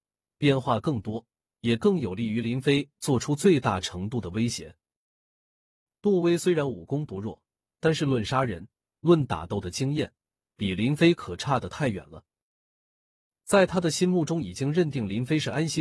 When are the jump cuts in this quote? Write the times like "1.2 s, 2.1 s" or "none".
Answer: none